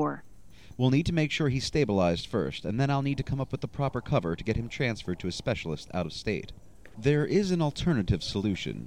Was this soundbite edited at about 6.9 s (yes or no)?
yes